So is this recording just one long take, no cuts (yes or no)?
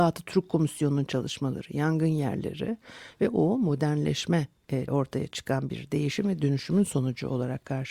no